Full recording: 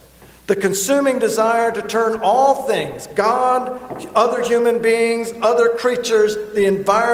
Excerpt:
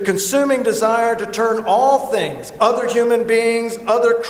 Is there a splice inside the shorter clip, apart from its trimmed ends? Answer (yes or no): yes